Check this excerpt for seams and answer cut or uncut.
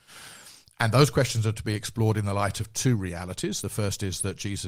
uncut